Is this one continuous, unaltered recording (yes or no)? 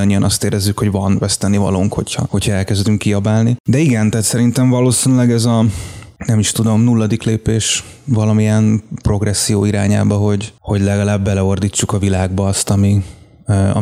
yes